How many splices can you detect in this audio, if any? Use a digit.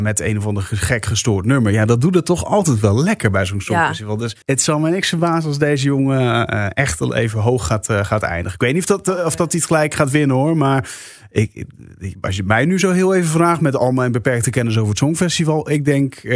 1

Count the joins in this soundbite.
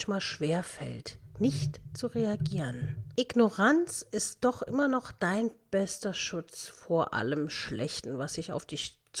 1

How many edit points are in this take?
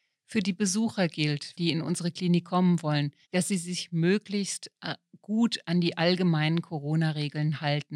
2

